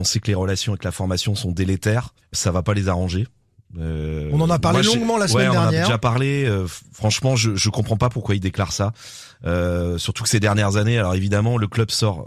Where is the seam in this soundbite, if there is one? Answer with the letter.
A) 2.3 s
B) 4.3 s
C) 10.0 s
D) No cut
A